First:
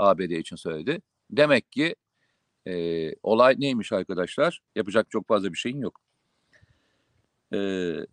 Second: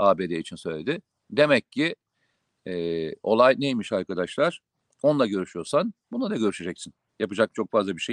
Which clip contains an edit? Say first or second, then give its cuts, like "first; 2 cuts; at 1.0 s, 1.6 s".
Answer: first; 1 cut; at 4.7 s